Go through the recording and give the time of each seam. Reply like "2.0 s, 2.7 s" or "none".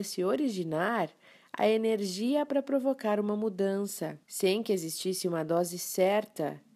4.2 s